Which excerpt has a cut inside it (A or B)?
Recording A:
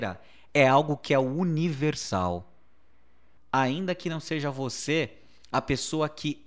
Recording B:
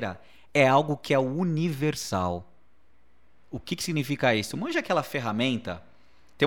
A